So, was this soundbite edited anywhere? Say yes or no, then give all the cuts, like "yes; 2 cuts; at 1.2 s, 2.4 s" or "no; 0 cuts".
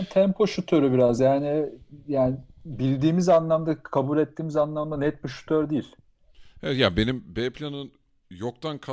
no; 0 cuts